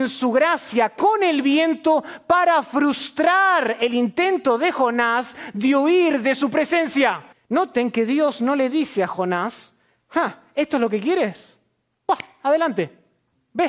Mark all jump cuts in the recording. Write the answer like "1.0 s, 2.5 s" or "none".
7.3 s